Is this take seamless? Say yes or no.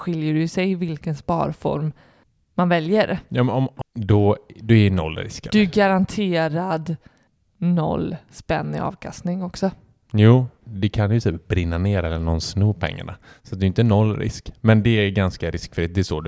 no